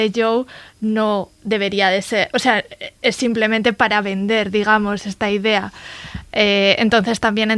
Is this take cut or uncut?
uncut